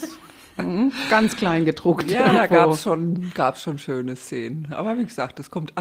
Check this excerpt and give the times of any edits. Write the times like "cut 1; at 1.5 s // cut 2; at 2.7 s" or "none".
none